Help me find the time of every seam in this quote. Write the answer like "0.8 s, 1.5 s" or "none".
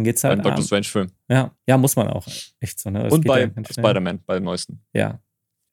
none